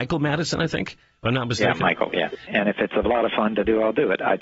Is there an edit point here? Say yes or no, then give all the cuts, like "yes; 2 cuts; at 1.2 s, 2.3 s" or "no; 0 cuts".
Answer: yes; 1 cut; at 2.5 s